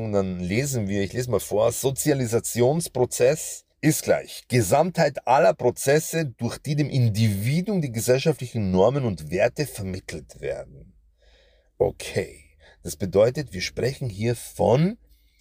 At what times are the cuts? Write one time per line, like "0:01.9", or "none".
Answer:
0:03.7